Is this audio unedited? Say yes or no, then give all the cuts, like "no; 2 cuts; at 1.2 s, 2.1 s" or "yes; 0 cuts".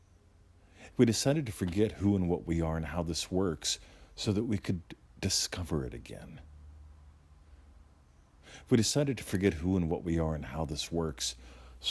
no; 1 cut; at 0.9 s